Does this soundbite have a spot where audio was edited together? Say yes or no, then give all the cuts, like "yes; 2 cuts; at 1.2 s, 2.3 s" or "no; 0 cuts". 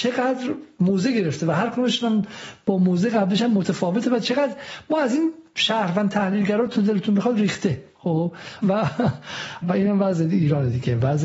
yes; 2 cuts; at 8.6 s, 9.6 s